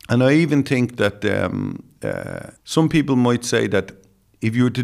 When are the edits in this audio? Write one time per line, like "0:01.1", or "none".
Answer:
0:02.6